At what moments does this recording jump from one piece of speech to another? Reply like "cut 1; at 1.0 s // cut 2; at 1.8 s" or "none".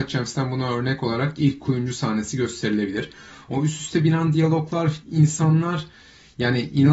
cut 1; at 5.0 s